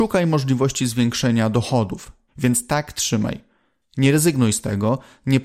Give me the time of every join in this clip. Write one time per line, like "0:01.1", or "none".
0:02.3